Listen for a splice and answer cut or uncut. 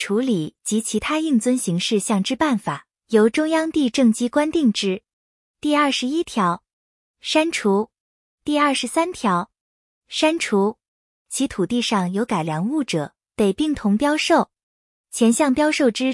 cut